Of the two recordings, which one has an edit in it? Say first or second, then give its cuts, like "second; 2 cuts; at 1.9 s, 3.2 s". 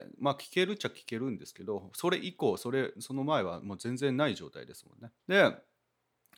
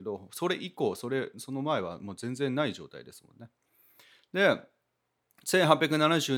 first; 1 cut; at 5.2 s